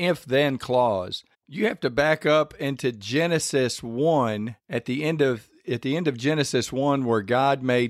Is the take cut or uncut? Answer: cut